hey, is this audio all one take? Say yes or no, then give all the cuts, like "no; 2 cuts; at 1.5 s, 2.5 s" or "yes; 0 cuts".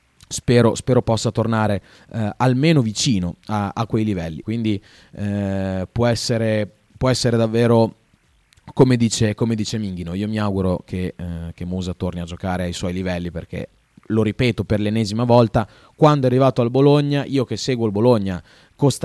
no; 1 cut; at 4.4 s